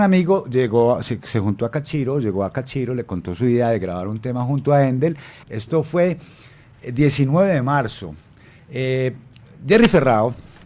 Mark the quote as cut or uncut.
cut